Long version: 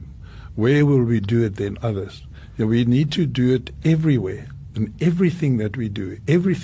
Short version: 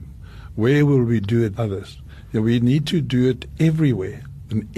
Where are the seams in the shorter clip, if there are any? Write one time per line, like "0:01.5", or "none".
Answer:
0:01.6